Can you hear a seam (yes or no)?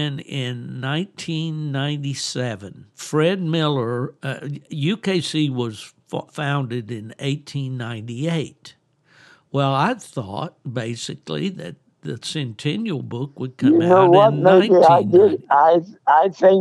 yes